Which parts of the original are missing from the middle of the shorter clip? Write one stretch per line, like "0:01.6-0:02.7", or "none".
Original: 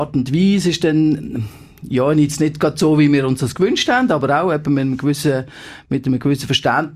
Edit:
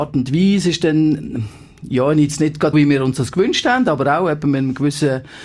0:02.7-0:03.0